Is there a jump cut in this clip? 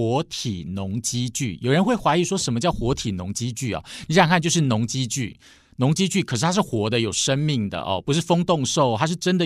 no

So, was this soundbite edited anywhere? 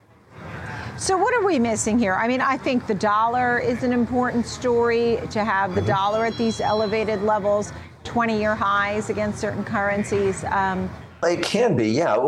yes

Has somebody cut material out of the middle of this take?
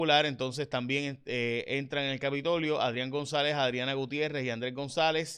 no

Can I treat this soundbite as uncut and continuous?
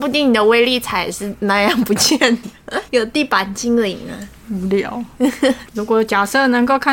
no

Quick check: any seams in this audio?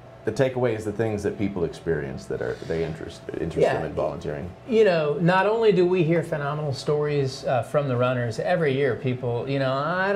no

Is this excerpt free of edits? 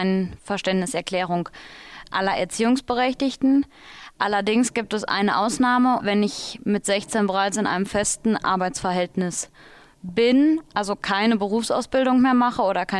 no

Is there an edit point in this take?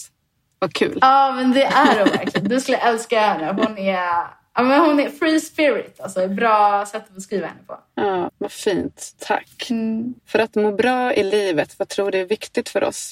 yes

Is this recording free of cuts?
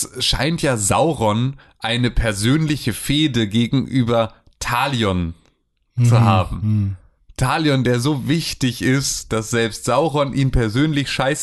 yes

